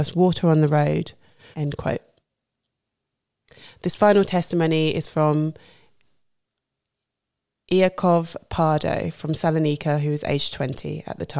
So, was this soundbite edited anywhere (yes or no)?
yes